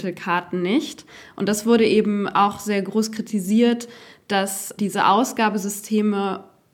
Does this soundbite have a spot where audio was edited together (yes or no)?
yes